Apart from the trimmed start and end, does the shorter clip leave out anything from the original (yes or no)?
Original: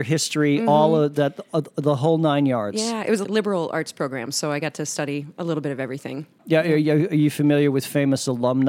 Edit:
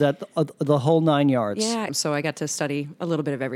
yes